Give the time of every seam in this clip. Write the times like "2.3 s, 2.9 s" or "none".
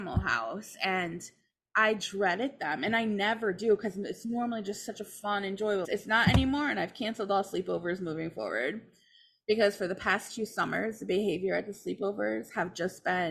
5.8 s